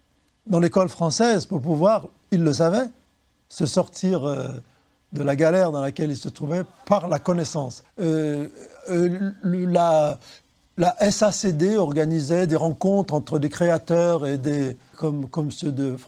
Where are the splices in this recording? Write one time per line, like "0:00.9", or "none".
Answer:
0:07.8
0:14.9